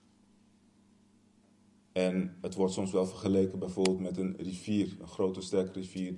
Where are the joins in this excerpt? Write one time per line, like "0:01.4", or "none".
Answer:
0:01.8